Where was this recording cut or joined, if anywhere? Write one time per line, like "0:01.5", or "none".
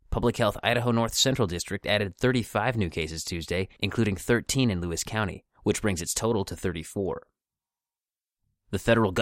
none